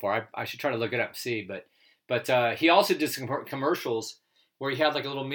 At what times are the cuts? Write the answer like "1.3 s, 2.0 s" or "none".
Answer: none